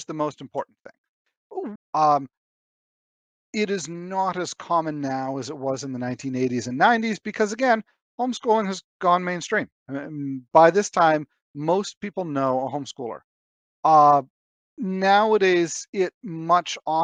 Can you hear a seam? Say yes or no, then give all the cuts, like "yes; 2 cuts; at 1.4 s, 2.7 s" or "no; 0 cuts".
yes; 1 cut; at 1.8 s